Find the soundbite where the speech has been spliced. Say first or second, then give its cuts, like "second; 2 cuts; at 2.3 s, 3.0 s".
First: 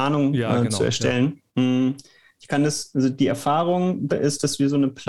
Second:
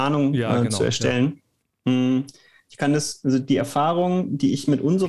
first; 2 cuts; at 1.5 s, 4.1 s